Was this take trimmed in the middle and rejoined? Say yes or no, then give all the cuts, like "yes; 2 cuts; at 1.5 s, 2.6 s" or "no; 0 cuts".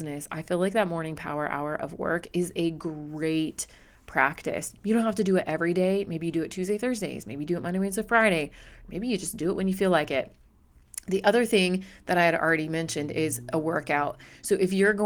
no; 0 cuts